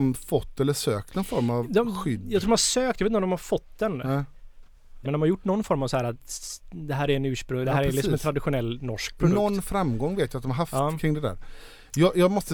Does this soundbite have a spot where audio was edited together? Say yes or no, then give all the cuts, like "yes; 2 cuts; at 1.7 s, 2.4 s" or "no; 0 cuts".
yes; 1 cut; at 5.0 s